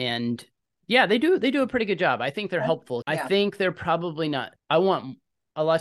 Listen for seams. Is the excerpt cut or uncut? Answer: cut